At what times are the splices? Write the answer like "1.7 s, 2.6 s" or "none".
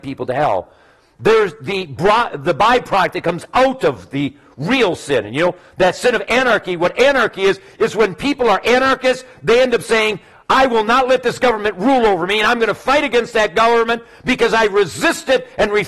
none